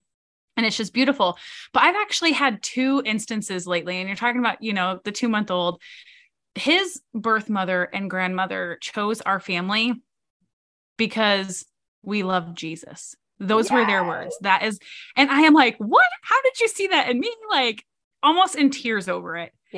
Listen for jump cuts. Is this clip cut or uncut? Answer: uncut